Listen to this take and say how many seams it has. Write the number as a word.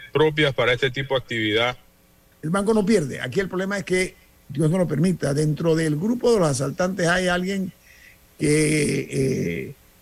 one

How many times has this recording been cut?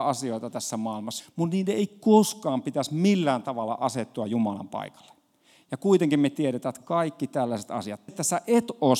two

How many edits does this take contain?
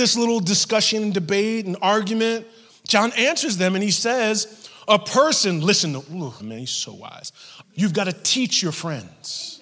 two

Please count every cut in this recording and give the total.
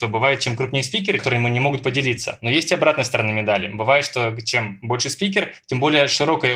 one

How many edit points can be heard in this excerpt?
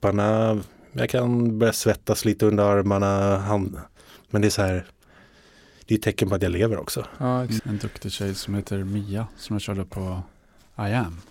one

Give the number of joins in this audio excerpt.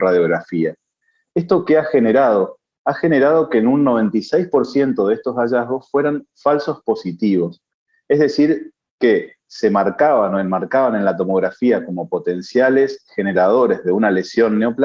zero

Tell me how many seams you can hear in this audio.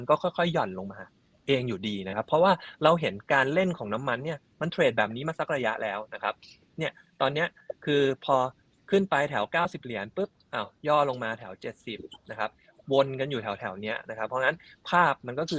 zero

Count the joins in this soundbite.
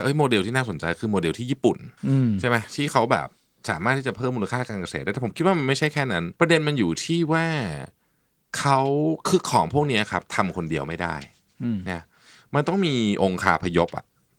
two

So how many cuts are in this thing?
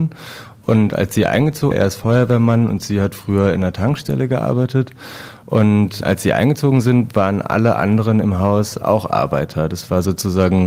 one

